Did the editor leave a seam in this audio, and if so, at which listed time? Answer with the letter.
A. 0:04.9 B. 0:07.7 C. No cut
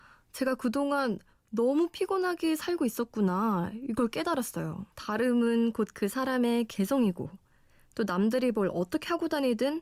A